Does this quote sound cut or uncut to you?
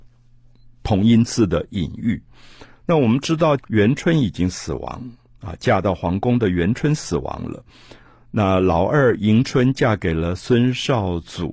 cut